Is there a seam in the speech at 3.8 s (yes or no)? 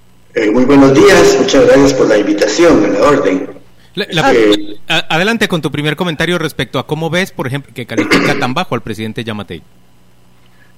yes